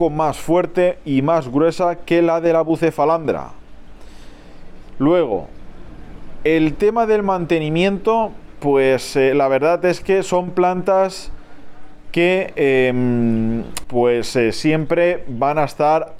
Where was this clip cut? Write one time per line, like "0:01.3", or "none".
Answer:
0:13.8

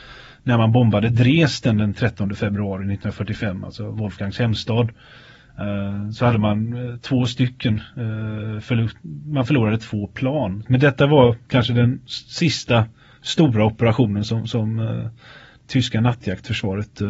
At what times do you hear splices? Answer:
0:10.6

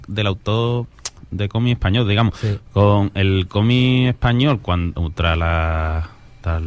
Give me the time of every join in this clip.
none

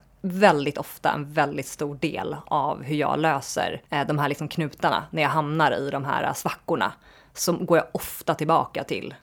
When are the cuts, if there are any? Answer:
0:03.9

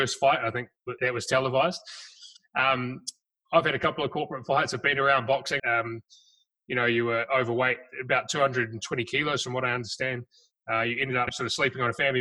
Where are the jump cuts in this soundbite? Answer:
0:01.0
0:05.6

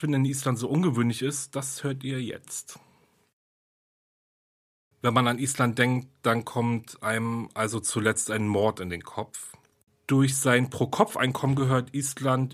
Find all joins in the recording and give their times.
0:04.9
0:09.9

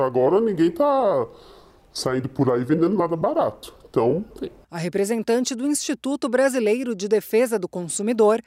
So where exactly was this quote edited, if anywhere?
0:04.3

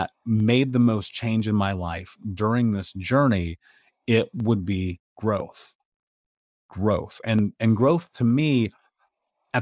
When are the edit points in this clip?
none

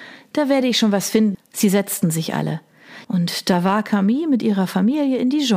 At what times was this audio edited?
0:01.3
0:03.0

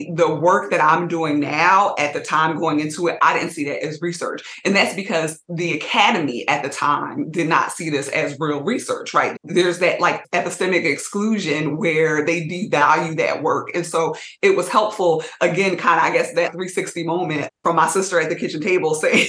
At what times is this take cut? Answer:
0:09.3
0:13.7

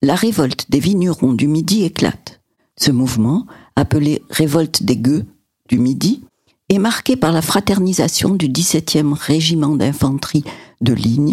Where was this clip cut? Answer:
0:02.7

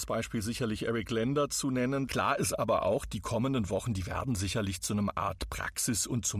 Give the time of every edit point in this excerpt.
0:02.1

